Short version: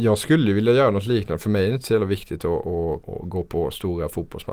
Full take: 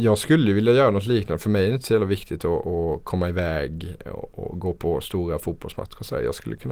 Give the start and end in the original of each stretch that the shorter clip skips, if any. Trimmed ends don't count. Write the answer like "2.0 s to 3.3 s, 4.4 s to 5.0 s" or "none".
3.0 s to 4.3 s